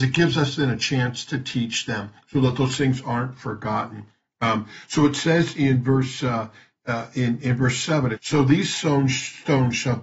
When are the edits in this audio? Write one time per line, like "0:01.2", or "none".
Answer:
0:08.1

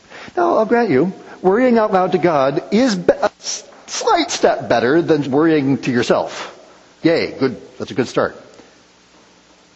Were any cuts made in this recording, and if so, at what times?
0:05.2
0:07.0

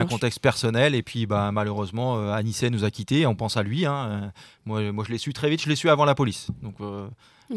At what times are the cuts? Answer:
none

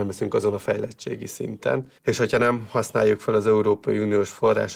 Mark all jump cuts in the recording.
0:02.0

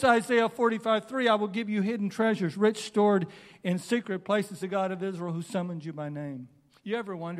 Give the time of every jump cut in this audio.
0:04.6

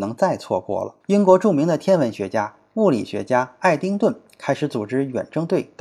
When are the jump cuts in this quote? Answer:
0:01.0

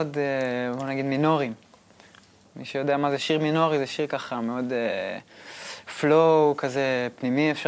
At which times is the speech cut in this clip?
none

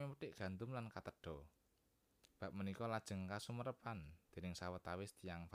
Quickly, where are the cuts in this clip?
none

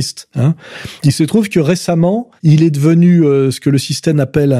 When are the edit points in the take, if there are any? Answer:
0:02.4

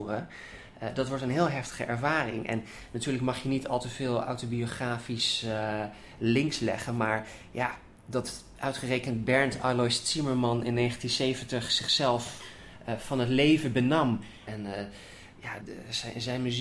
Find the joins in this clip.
0:14.5
0:15.6

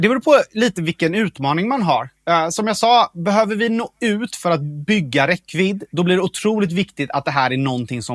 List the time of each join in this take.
none

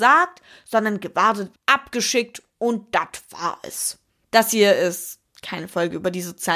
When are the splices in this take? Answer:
0:01.5
0:04.2

